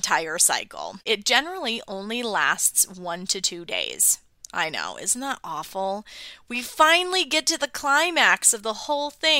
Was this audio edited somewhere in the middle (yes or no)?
no